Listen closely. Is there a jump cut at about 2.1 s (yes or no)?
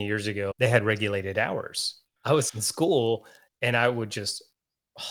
no